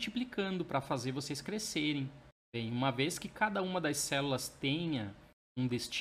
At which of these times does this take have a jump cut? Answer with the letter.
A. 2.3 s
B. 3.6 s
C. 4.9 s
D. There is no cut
A